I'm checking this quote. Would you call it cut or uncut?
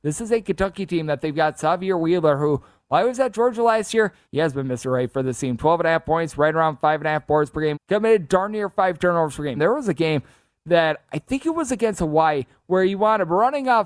cut